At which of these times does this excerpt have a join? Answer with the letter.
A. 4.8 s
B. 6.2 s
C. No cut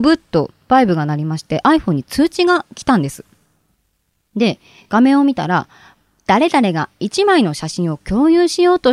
C